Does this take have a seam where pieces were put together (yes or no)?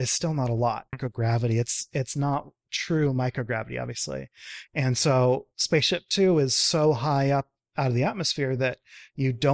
yes